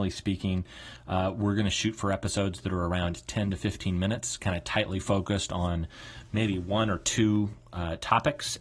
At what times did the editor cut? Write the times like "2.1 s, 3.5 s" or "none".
none